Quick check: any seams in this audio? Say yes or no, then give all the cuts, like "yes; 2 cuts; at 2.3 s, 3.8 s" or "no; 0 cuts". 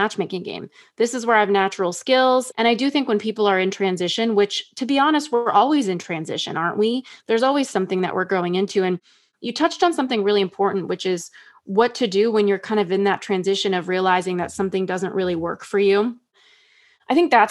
yes; 1 cut; at 2.5 s